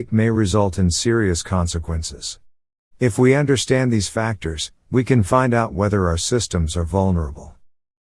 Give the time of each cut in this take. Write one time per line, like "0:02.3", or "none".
0:02.9